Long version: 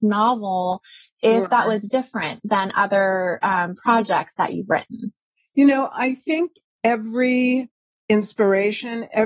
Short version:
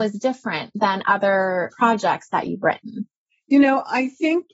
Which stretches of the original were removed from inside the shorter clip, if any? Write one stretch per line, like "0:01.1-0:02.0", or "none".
0:03.4-0:03.8